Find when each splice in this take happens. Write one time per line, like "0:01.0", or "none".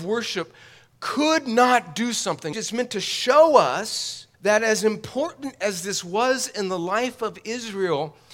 0:02.5
0:04.3